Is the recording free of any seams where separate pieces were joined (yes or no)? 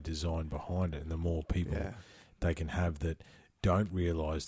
yes